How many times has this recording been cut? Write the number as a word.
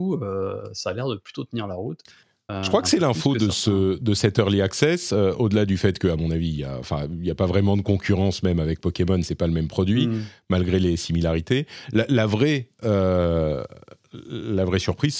zero